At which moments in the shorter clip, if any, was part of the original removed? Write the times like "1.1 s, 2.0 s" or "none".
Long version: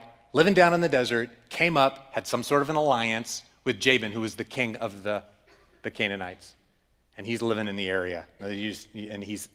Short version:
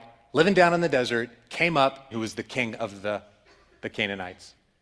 2.1 s